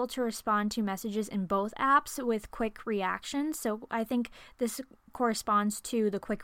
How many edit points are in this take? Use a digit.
0